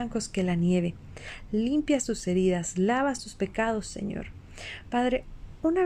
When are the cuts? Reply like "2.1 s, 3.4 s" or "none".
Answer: none

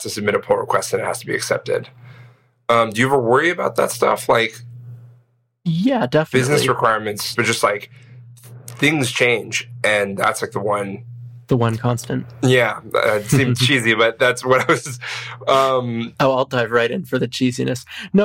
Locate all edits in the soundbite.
7.3 s

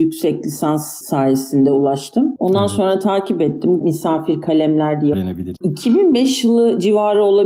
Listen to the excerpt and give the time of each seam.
3.8 s, 5.1 s

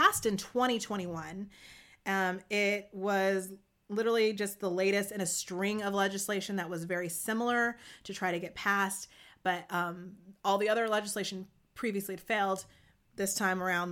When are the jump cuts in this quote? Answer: none

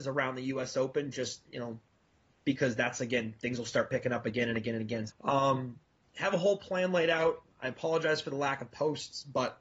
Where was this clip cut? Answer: 5.1 s

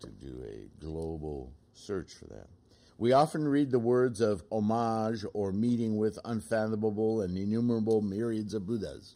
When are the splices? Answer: 2.9 s, 4.5 s

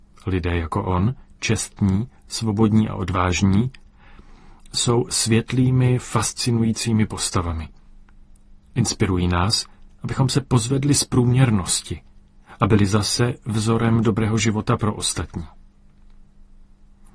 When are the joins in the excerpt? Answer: none

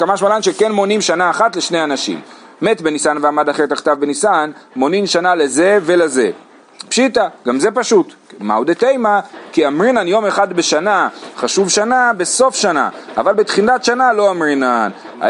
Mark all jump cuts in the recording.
none

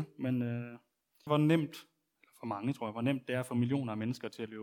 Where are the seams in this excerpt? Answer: 1.3 s

